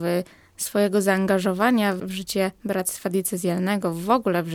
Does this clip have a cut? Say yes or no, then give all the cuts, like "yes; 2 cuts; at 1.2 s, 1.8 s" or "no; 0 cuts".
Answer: yes; 1 cut; at 2.0 s